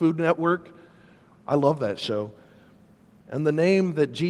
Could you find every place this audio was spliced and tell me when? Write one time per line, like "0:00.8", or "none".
0:03.2